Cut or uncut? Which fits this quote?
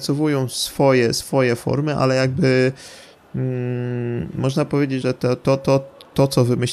cut